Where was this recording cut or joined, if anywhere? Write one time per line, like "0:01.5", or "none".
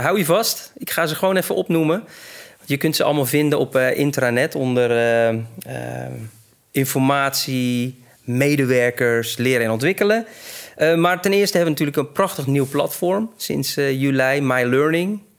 none